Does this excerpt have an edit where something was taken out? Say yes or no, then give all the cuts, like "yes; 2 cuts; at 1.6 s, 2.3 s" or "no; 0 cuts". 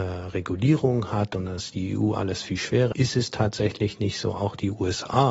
yes; 1 cut; at 2.9 s